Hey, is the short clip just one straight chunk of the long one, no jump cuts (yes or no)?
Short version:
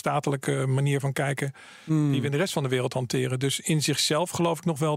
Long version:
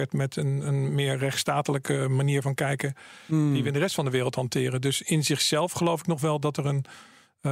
yes